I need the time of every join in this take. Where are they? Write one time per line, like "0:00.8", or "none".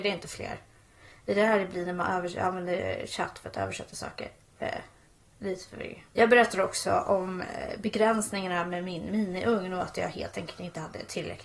0:06.1